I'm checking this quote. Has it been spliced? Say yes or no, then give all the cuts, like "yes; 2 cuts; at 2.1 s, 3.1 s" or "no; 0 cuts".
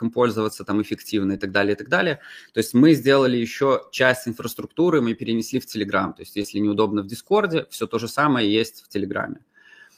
no; 0 cuts